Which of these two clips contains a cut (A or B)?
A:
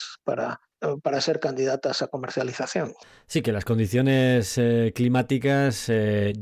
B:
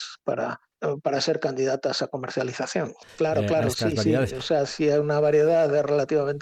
B